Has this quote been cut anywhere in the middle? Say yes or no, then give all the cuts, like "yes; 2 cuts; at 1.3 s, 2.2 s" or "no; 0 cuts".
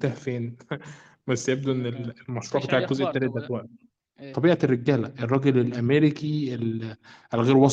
yes; 1 cut; at 4.3 s